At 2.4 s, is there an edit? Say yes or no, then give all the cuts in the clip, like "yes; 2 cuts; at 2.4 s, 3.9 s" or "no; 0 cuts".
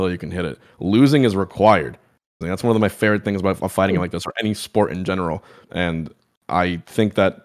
yes; 2 cuts; at 2.4 s, 5.6 s